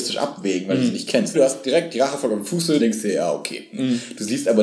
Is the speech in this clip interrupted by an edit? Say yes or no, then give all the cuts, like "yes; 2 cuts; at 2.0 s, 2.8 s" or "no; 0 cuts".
yes; 2 cuts; at 1.3 s, 2.8 s